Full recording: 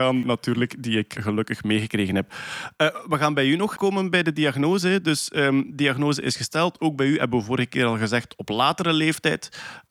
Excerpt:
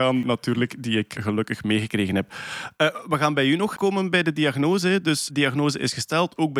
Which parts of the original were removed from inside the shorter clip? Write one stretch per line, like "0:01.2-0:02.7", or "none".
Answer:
0:05.3-0:05.7

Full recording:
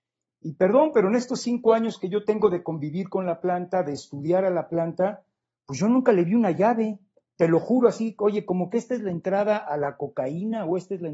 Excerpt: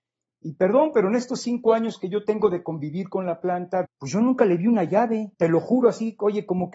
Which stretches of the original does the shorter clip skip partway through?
0:03.8-0:05.5
0:07.0-0:07.3

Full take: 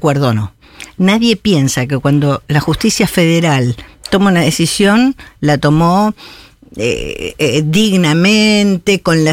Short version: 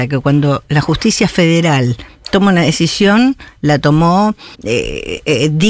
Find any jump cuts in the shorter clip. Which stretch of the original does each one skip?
0:06.3-0:06.7

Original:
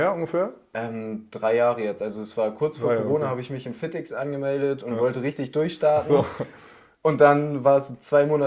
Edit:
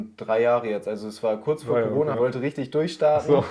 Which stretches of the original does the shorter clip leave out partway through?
0:03.3-0:05.0

